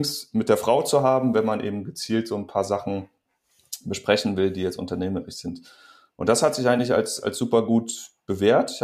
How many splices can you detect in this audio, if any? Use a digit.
0